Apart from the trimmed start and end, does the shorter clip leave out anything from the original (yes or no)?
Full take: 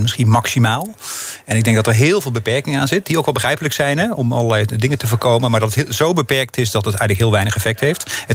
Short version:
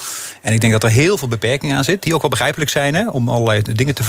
no